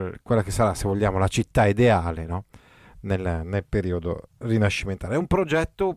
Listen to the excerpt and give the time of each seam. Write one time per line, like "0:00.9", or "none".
none